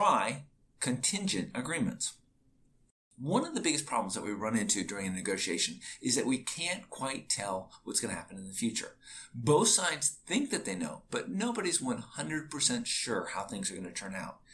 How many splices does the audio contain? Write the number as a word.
zero